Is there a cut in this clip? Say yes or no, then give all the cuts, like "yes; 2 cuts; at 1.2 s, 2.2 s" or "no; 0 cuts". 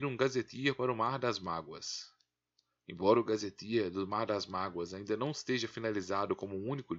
no; 0 cuts